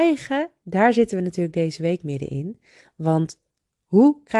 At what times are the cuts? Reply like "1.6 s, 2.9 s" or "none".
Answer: none